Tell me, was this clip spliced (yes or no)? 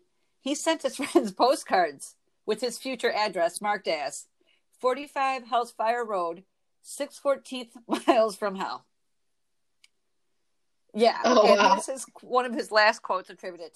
no